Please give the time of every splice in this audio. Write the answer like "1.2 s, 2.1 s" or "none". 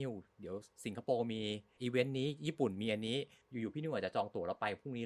none